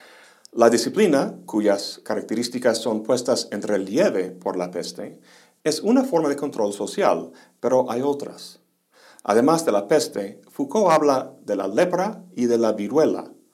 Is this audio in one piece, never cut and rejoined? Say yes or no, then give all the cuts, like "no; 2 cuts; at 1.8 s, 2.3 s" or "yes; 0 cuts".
yes; 0 cuts